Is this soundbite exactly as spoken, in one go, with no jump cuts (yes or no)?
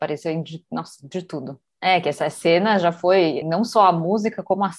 no